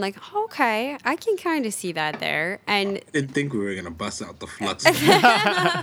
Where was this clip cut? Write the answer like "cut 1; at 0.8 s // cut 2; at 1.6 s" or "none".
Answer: none